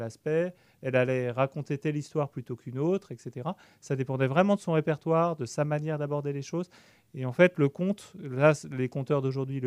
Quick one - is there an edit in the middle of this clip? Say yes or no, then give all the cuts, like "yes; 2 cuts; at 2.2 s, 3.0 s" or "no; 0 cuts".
no; 0 cuts